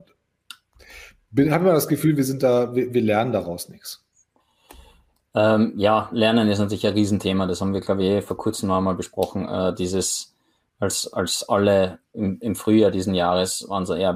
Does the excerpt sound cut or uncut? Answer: uncut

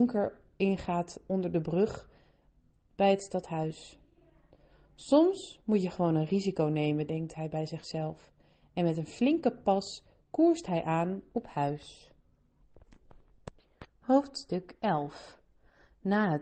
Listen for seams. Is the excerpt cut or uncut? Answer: uncut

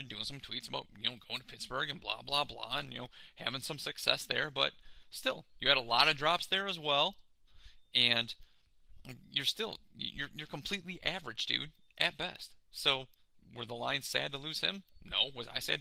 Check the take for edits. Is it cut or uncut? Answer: uncut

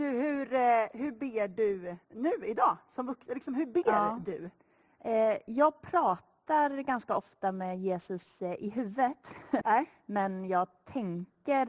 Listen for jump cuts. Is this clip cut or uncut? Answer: cut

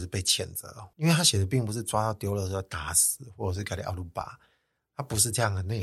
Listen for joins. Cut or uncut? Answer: cut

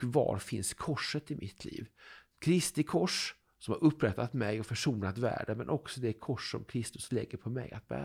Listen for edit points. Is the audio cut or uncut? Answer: uncut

